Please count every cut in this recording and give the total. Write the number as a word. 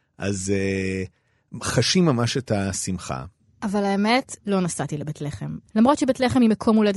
two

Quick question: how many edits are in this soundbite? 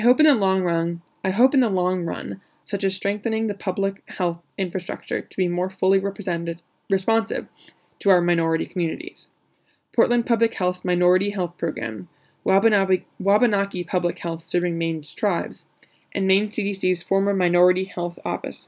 one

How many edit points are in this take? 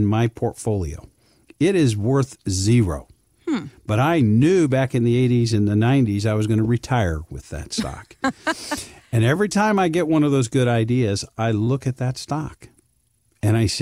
zero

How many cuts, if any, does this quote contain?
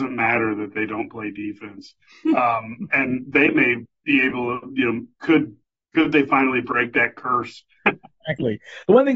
one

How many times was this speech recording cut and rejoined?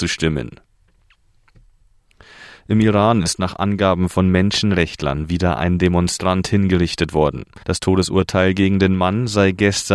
one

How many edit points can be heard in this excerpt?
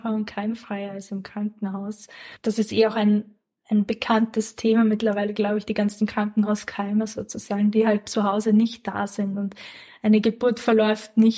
zero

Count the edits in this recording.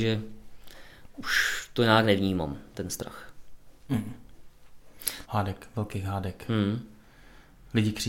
two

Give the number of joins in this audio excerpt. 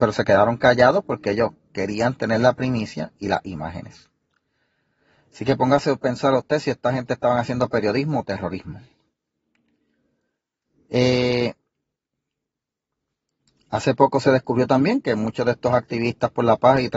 zero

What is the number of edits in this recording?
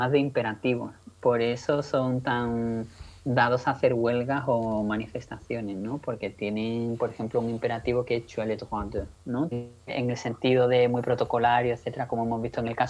one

